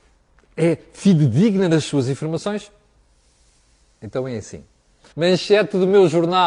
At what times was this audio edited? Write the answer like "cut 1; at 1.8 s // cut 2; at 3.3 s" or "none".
cut 1; at 5.1 s